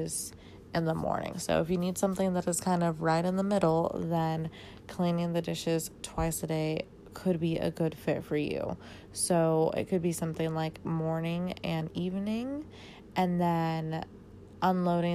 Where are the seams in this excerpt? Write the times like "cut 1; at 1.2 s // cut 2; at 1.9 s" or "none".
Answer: cut 1; at 1.3 s